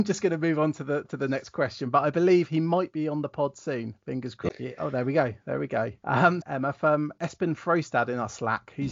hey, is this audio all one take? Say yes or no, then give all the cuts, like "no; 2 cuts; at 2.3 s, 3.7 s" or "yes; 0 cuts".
no; 2 cuts; at 4.5 s, 6.4 s